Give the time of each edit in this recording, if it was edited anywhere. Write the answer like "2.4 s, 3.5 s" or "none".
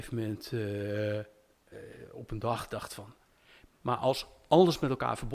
1.7 s

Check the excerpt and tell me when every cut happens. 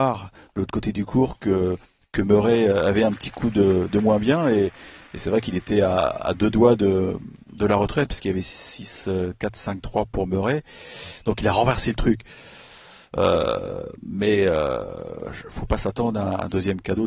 none

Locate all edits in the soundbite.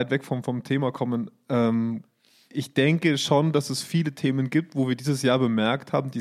none

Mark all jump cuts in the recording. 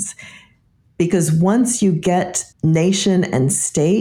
2.5 s

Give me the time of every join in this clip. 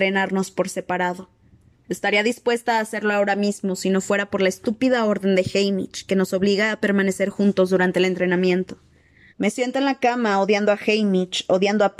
1.7 s, 9.3 s

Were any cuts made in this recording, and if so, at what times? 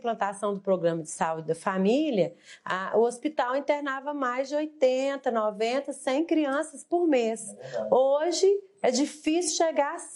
none

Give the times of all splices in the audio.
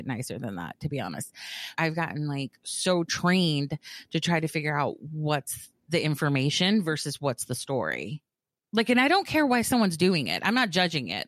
1.7 s

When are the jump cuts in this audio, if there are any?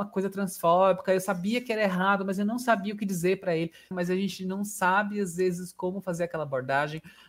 3.9 s

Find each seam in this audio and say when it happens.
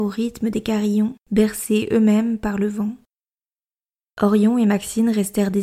1.2 s, 4.0 s

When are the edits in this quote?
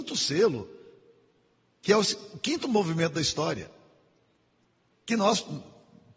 none

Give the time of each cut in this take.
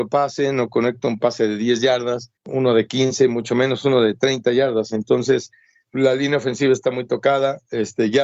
2.4 s, 5.9 s

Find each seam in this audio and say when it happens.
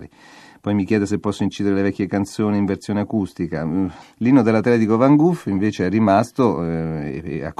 4.0 s

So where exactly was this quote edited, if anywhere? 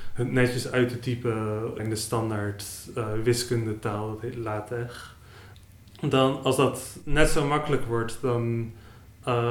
none

